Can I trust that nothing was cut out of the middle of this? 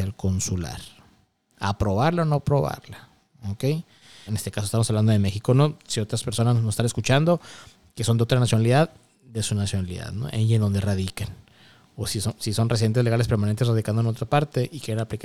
no; 2 cuts; at 4.3 s, 12.4 s

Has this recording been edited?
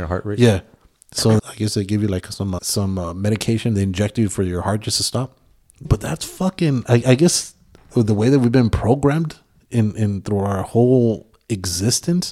yes; 3 cuts; at 1.4 s, 2.6 s, 5.8 s

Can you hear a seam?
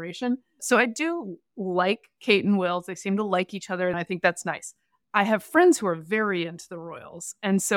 yes; 1 cut; at 3.9 s

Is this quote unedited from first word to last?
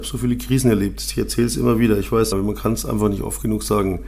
no; 1 cut; at 2.3 s

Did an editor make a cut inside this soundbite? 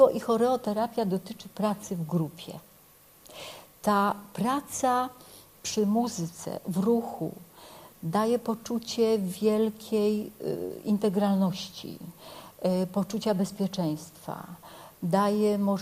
no; 0 cuts

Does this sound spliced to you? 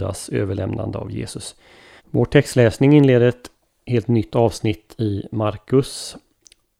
yes; 1 cut; at 2.0 s

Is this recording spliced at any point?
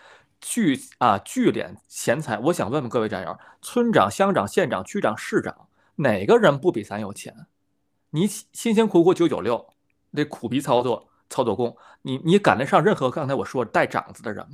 no; 0 cuts

